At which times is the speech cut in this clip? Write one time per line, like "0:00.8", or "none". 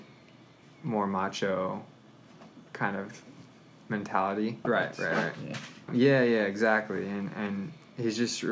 0:04.6
0:05.9